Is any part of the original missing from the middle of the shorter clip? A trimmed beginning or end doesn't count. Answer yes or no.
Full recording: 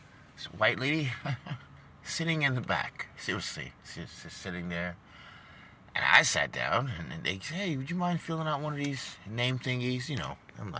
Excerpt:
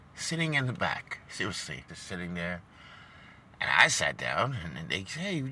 yes